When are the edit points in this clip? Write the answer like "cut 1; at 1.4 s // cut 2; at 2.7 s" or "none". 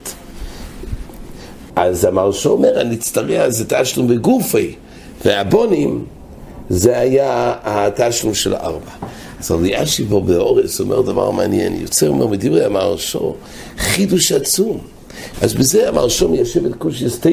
cut 1; at 1.7 s // cut 2; at 15.3 s